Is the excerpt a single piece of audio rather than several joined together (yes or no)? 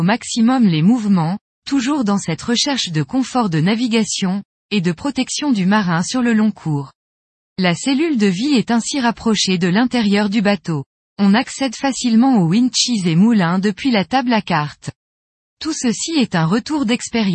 yes